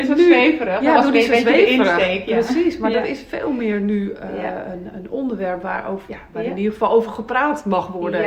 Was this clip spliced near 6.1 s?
yes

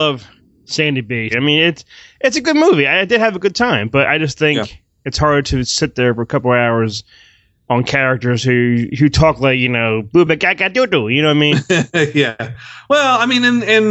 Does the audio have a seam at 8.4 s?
no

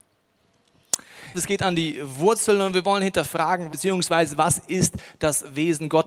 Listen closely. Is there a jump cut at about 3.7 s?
yes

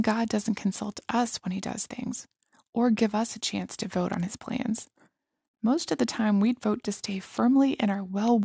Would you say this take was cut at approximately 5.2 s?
no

